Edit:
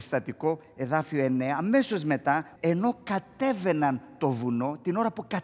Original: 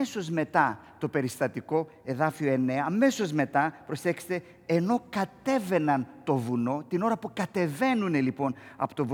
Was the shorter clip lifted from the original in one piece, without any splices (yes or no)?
no